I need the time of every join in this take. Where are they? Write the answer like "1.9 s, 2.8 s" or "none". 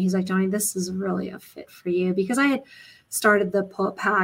none